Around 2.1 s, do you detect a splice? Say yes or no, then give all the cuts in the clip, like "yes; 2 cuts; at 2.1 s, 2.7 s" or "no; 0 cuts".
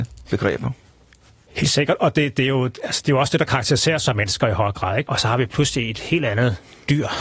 no; 1 cut; at 5.0 s